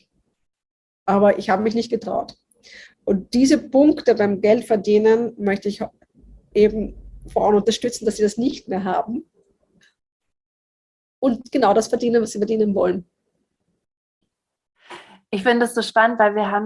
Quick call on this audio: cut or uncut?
uncut